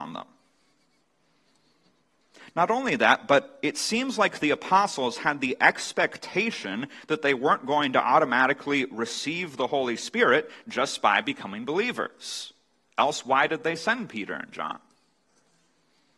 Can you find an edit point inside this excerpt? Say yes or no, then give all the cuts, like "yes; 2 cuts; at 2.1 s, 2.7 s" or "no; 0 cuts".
no; 0 cuts